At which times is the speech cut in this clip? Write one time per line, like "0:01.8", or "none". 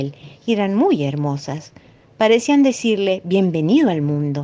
none